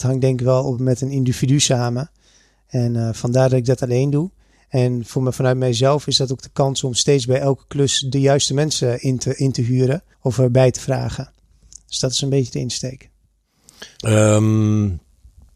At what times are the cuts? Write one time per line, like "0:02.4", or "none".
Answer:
0:10.1
0:14.0